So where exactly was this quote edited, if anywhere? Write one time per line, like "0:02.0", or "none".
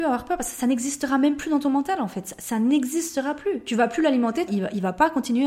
0:04.5